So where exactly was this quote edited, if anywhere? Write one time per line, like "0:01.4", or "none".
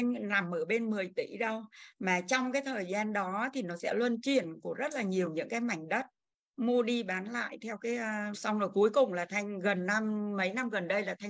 0:08.3